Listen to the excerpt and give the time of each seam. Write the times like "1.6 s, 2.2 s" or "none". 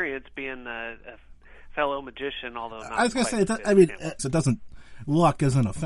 4.2 s